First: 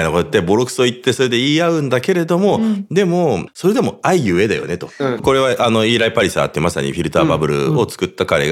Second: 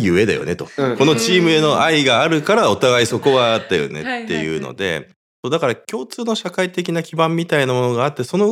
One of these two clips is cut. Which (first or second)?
first